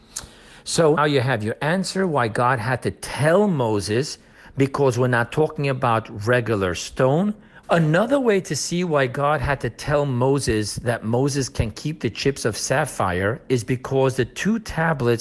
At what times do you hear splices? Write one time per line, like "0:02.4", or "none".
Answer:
0:01.0
0:07.6